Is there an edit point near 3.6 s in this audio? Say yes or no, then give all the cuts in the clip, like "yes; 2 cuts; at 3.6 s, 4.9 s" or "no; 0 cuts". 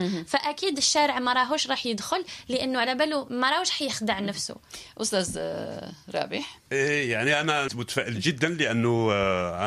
no; 2 cuts; at 6.7 s, 7.7 s